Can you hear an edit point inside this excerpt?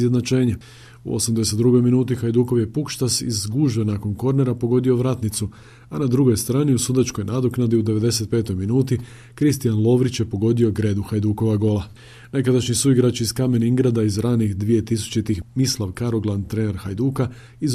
no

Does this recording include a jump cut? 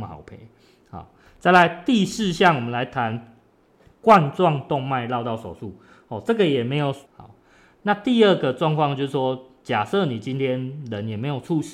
yes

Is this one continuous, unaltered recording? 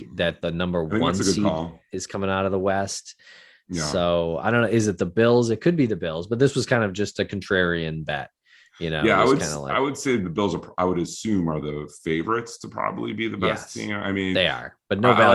yes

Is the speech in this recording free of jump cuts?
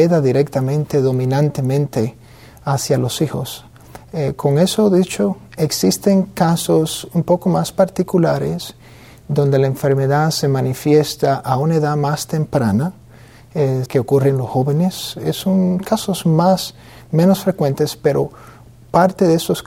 no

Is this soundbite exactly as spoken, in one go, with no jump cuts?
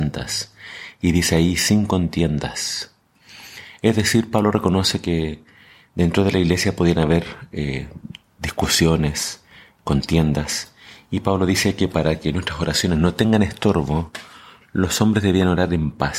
yes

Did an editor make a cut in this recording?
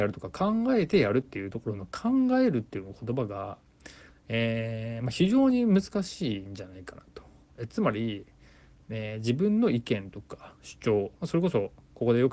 no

